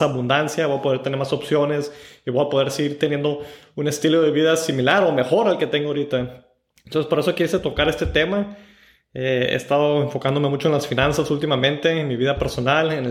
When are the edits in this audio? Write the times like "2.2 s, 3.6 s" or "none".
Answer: none